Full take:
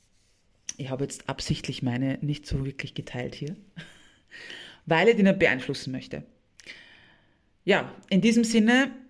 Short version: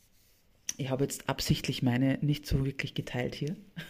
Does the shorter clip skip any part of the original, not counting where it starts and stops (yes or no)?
no